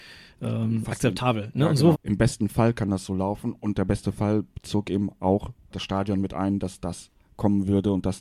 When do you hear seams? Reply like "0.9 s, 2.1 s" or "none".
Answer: 1.9 s, 5.7 s